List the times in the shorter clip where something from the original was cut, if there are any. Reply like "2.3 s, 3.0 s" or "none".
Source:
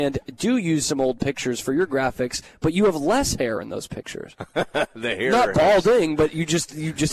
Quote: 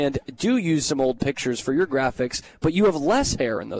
none